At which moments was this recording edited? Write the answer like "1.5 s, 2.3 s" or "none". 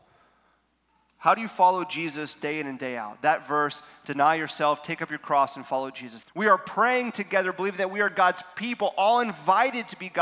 6.2 s